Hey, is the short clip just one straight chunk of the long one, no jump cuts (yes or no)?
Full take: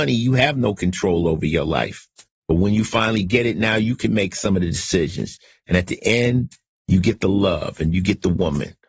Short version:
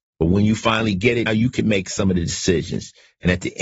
no